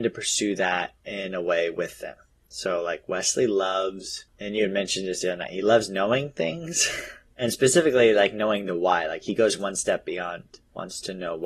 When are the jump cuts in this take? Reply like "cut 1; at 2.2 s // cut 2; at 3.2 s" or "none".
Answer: none